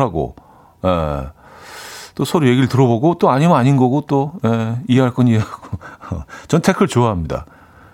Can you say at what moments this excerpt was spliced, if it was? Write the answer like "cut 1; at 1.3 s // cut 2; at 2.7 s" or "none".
none

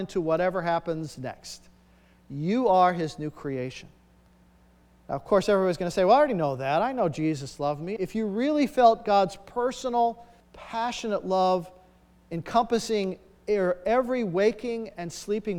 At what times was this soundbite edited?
cut 1; at 8.0 s // cut 2; at 10.4 s

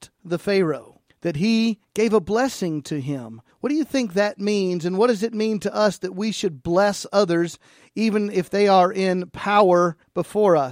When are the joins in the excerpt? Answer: none

